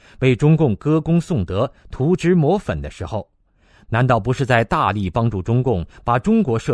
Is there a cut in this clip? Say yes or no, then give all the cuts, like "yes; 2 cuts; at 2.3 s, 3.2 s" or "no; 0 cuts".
no; 0 cuts